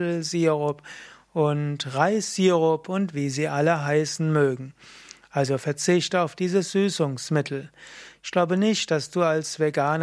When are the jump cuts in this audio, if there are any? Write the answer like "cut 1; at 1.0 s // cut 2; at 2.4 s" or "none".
cut 1; at 8.1 s